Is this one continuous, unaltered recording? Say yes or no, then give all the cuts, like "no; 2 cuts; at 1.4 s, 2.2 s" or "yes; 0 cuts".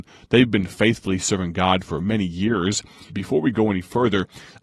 no; 1 cut; at 3.1 s